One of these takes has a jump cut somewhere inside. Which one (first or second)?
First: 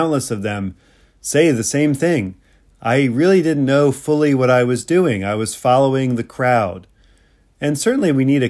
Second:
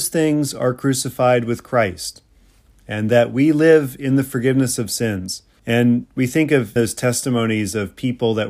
second